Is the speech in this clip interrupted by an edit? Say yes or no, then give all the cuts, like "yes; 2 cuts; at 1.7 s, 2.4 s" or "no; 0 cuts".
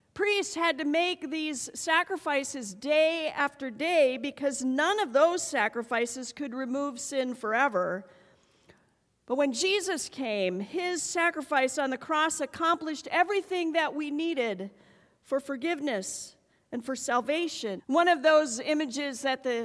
yes; 1 cut; at 17.8 s